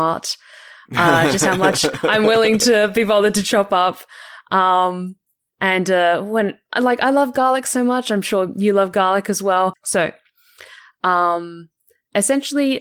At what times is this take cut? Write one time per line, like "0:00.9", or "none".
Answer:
0:09.7